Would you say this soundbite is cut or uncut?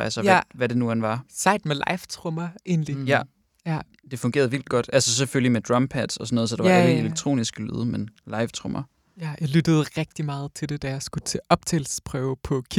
uncut